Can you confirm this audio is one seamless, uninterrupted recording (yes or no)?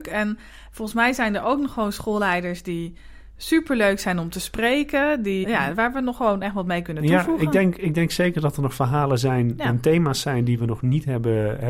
no